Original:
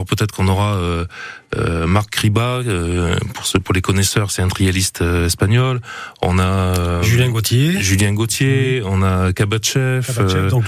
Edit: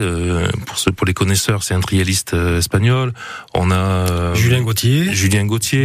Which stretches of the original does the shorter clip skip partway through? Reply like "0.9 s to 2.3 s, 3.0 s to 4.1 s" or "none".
none